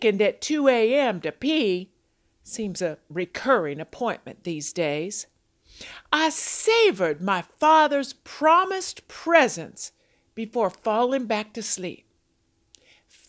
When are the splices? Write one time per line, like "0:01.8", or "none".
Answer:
none